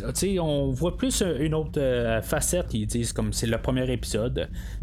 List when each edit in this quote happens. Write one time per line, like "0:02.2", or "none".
0:02.7